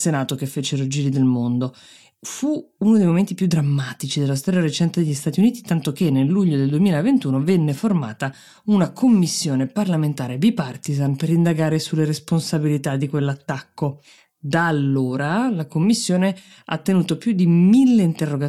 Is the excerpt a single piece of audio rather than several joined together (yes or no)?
yes